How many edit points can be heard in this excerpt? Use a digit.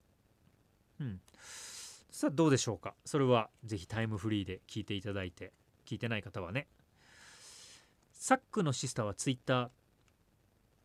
1